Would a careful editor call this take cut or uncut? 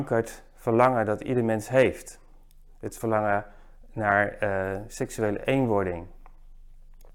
uncut